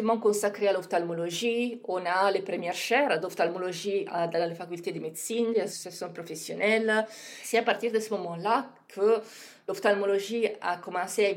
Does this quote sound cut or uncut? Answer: uncut